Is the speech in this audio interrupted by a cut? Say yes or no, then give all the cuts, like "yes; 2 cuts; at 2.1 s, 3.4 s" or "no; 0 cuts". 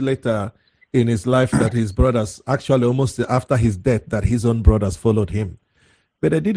no; 0 cuts